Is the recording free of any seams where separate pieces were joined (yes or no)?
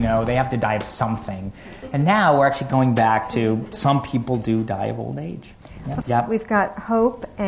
no